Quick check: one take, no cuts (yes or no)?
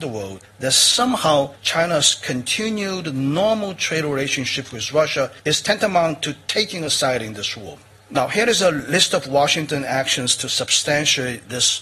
yes